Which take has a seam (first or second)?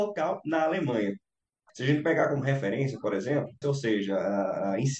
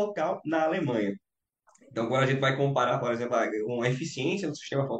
first